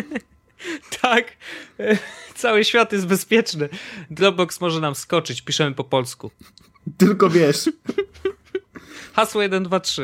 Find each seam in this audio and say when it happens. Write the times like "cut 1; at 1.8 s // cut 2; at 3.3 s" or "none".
none